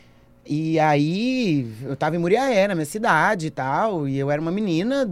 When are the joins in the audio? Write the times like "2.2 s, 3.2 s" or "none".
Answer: none